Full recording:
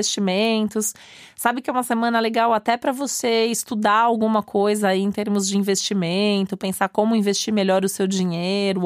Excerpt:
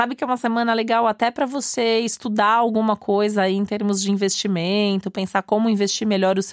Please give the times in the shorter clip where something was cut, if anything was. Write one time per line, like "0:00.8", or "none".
none